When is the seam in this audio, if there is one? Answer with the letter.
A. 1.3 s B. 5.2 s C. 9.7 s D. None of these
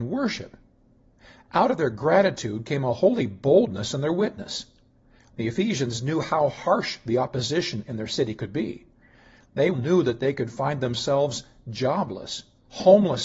C